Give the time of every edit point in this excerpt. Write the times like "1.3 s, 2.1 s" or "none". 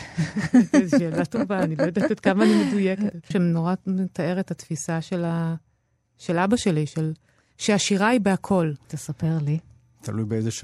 3.3 s, 8.8 s